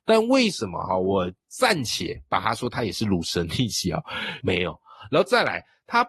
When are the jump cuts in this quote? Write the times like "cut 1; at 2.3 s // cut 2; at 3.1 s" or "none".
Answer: cut 1; at 4.4 s